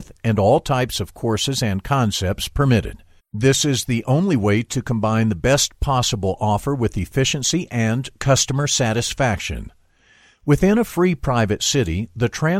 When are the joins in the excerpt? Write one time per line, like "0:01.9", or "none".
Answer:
0:03.2